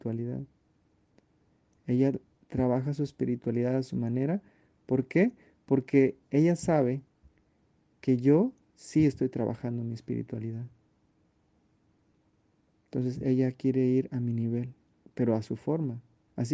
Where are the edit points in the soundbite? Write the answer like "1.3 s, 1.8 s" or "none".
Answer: none